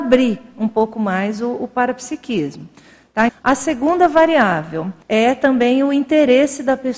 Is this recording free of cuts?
no; 2 cuts; at 3.3 s, 5.0 s

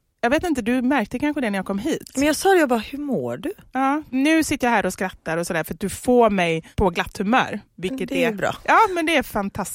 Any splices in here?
no; 0 cuts

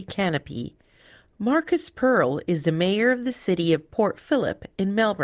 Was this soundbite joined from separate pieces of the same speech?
no; 0 cuts

